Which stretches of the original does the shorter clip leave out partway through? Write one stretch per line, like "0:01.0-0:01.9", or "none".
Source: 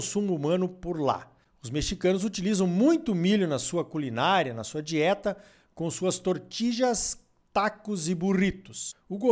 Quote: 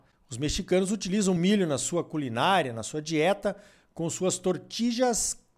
0:02.7-0:03.2